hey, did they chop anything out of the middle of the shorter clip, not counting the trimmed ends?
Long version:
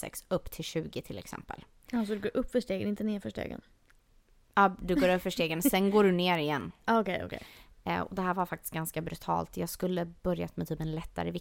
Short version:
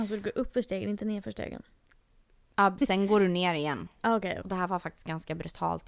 yes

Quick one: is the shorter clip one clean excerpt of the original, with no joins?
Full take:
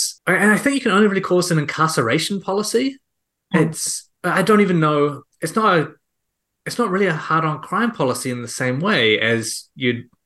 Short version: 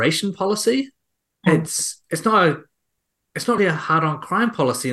no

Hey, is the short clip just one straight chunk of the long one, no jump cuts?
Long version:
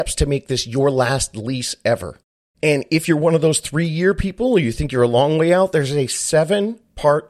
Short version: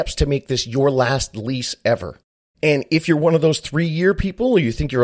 yes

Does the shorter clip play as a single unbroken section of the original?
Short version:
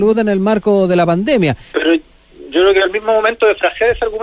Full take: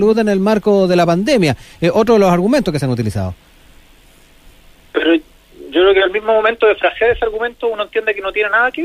no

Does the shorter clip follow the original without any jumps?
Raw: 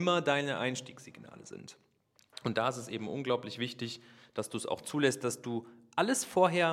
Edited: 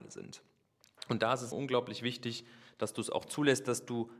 no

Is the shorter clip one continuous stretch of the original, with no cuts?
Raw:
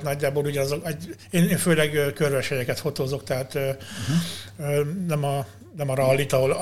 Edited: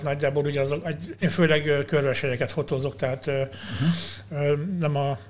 no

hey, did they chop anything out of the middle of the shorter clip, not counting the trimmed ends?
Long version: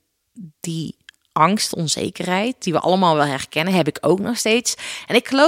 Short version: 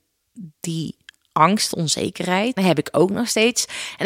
yes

